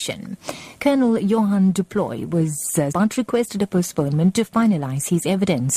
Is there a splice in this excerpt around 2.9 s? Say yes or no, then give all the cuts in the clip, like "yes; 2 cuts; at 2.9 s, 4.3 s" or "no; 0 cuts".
yes; 1 cut; at 2.9 s